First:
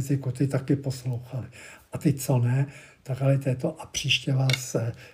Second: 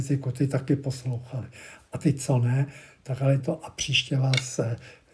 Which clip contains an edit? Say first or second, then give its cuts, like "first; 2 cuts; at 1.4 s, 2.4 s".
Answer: second; 1 cut; at 3.4 s